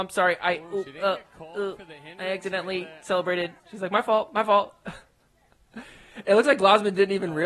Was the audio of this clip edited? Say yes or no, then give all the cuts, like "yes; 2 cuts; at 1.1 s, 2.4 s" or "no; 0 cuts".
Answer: yes; 1 cut; at 3.6 s